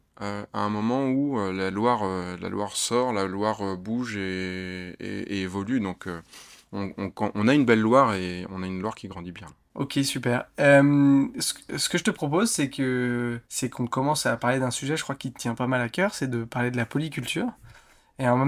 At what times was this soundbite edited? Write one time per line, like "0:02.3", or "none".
0:13.5